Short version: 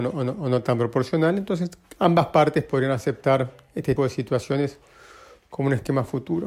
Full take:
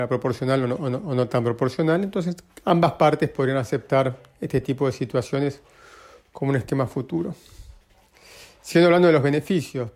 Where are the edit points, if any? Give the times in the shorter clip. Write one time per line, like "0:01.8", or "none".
0:04.0